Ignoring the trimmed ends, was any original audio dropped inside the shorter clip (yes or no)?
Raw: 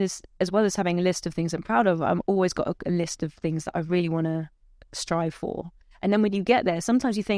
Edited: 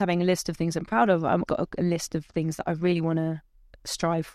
yes